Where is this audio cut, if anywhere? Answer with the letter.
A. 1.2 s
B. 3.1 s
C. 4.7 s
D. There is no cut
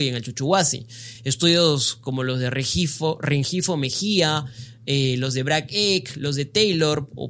D